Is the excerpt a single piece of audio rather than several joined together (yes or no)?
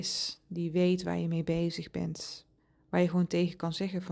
yes